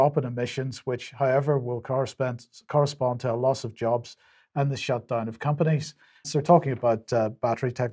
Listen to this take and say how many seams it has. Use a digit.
1